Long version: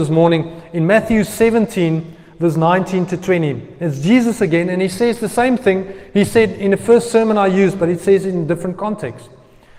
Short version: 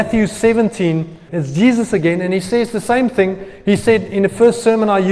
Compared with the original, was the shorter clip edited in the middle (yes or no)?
yes